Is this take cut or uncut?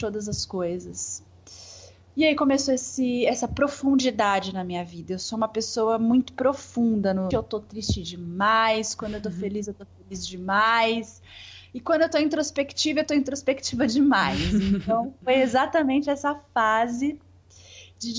cut